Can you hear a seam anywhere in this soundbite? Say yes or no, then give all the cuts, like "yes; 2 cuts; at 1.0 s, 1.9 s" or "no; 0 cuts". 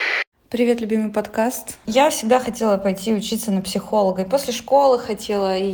yes; 1 cut; at 1.8 s